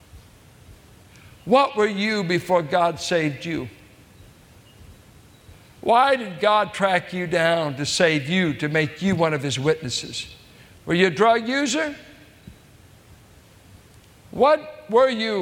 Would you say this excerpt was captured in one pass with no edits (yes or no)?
no